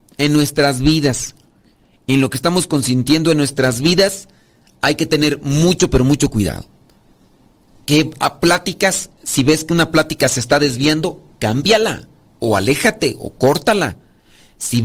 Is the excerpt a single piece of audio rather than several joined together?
yes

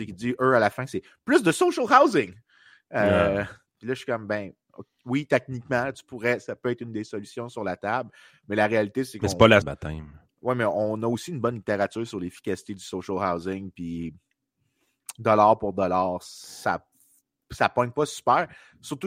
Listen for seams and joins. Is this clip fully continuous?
no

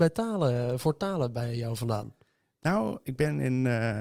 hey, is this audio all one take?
yes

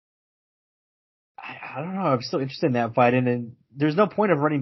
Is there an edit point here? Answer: no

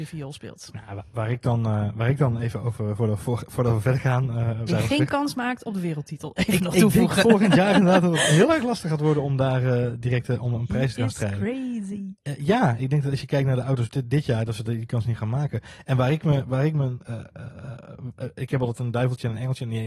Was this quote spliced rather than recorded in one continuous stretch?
yes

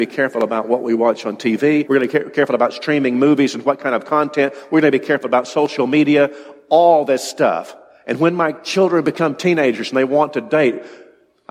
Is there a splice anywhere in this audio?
yes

